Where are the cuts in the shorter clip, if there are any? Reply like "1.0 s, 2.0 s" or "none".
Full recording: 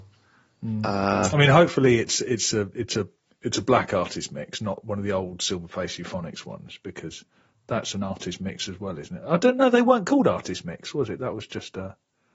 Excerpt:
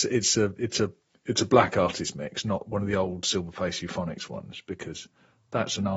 none